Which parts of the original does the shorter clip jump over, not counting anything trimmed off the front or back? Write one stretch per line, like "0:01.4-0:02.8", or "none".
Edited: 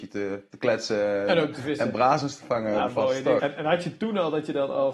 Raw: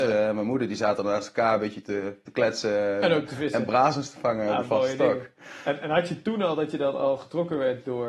0:05.1-0:05.6